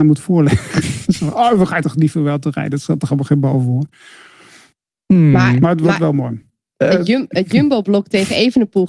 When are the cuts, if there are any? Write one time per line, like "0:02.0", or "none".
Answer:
none